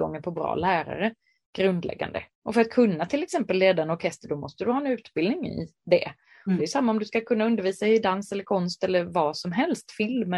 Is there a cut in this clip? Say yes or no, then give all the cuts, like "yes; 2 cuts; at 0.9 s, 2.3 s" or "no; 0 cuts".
yes; 2 cuts; at 2.3 s, 6.6 s